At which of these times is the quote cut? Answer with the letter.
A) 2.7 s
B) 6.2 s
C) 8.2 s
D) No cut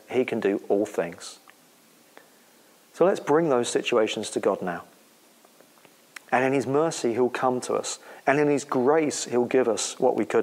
B